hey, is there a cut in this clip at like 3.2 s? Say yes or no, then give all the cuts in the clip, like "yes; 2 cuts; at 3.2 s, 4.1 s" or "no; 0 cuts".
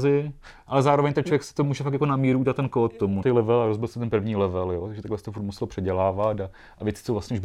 yes; 1 cut; at 3.2 s